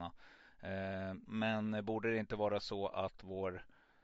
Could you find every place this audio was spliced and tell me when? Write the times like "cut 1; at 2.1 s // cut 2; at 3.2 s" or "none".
cut 1; at 1.3 s